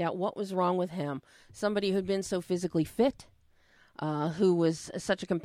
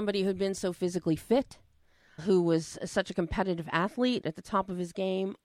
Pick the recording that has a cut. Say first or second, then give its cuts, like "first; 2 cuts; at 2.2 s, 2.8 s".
second; 1 cut; at 2.2 s